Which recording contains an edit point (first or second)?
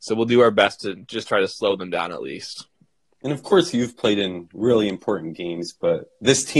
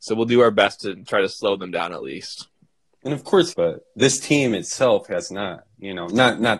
second